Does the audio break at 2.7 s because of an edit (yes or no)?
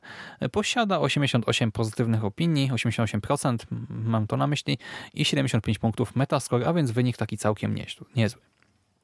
no